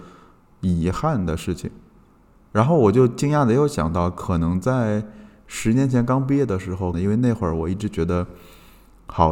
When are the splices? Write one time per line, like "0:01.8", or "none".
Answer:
0:06.9